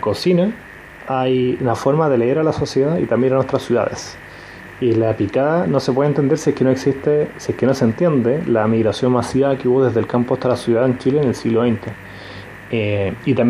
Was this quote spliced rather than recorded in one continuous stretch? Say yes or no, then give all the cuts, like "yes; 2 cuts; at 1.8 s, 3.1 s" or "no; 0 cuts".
no; 0 cuts